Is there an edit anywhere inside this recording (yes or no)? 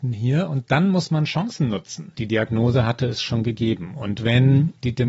yes